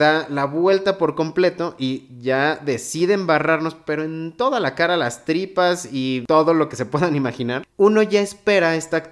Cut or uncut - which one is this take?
cut